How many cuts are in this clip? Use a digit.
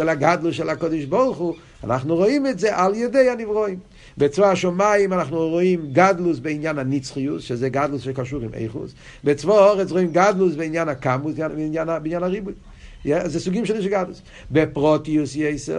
1